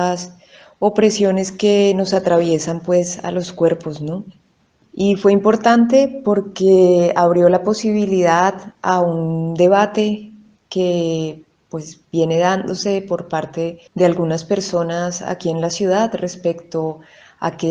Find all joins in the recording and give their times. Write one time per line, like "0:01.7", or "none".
0:04.8
0:13.9